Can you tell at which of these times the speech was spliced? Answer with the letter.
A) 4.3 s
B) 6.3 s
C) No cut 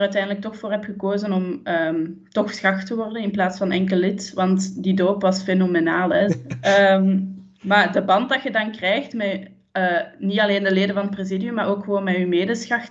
B